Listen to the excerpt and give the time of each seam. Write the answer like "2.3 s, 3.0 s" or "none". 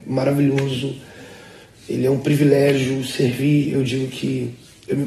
none

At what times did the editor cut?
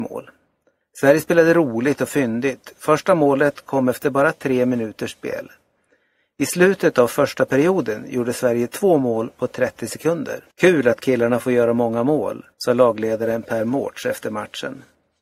10.5 s, 12.5 s

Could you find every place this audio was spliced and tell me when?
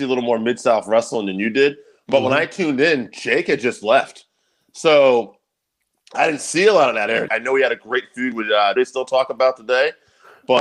7.3 s, 8.8 s

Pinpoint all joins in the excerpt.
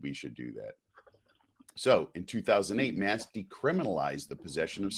none

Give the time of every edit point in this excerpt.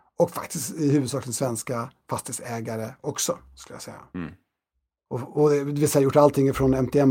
5.1 s

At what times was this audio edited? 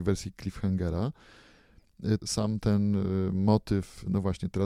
2.2 s

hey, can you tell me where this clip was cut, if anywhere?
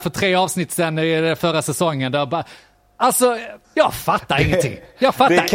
3.6 s

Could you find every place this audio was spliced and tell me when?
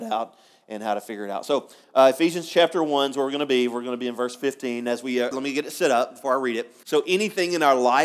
5.3 s, 6.8 s

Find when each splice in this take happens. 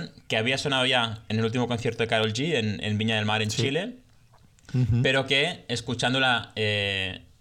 none

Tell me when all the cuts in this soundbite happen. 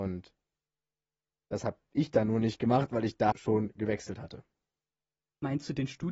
3.3 s

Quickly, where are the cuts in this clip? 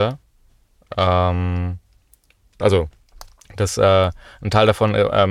2.6 s

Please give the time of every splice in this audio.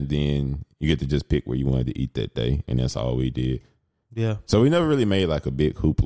none

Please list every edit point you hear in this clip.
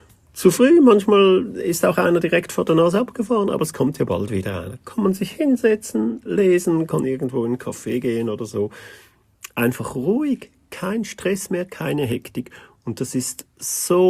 none

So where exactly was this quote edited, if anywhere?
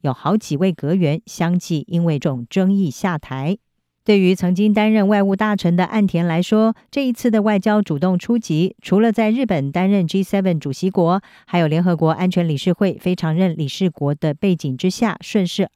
2.2 s, 4.0 s

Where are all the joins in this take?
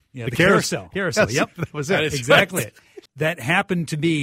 0.9 s, 3.1 s

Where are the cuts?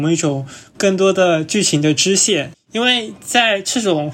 2.5 s

